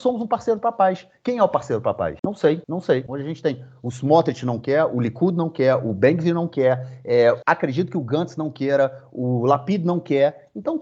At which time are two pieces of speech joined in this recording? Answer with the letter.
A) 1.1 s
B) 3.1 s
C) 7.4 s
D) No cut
B